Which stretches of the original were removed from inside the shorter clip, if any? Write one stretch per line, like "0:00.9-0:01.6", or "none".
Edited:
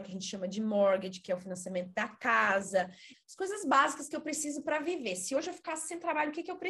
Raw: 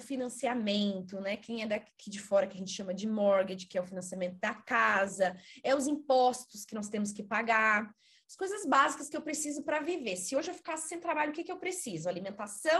0:05.6-0:08.1